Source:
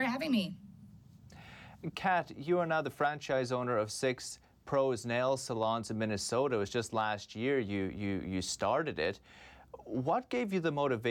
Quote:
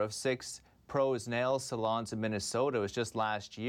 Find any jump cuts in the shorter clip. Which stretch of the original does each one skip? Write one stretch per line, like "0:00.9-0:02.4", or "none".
none

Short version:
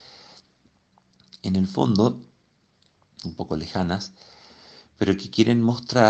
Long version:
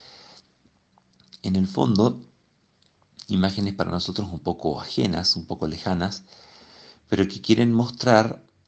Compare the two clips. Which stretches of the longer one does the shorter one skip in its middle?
0:03.2-0:05.3

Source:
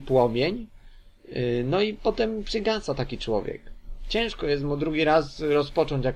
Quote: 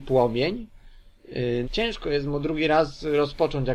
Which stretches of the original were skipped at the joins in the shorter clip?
0:01.6-0:04.0

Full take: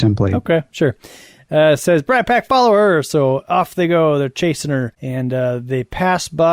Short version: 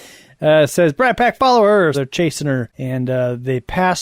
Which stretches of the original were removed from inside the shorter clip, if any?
0:03.0-0:04.2

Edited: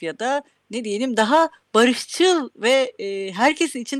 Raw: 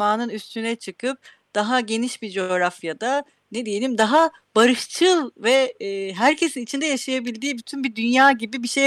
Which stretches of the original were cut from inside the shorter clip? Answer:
none

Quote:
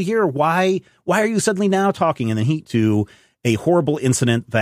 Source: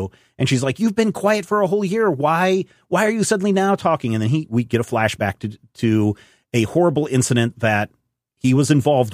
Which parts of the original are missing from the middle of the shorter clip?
0:04.5-0:05.7

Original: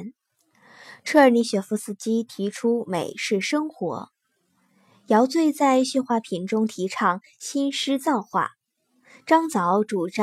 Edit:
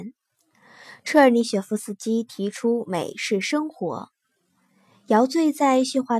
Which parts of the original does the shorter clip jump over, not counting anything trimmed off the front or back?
none

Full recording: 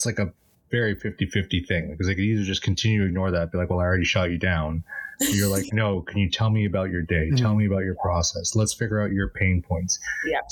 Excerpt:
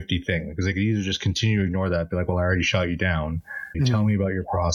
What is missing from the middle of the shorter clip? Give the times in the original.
0:05.2-0:07.3

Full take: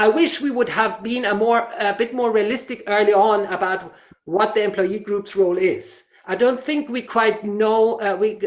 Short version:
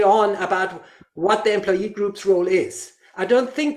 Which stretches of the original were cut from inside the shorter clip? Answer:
none

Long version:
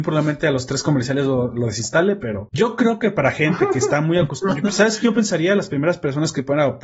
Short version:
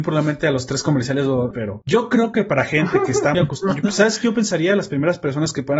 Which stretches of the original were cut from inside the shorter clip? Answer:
0:01.5-0:02.2
0:04.0-0:04.1

